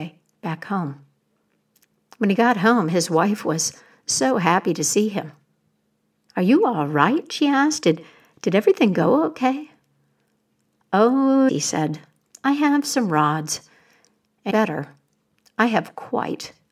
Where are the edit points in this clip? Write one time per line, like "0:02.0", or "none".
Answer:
0:11.5
0:14.5